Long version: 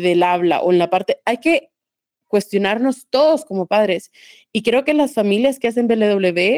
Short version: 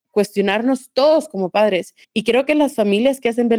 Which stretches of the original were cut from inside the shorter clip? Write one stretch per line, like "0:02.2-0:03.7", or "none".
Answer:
0:04.2-0:04.4